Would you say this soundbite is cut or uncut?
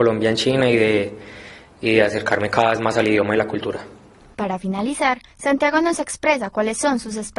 uncut